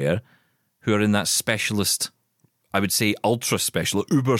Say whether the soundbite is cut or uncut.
uncut